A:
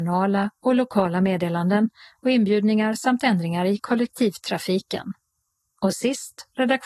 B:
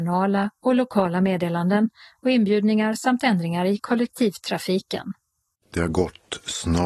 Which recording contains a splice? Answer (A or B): B